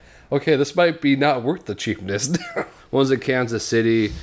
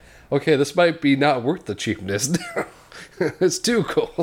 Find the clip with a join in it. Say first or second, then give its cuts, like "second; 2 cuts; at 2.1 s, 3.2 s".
first; 1 cut; at 2.8 s